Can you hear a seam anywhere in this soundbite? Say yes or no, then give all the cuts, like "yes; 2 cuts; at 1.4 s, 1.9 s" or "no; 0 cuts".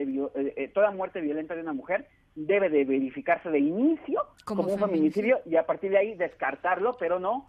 no; 0 cuts